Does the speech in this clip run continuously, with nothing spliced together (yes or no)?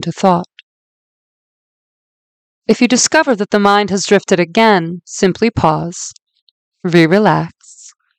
yes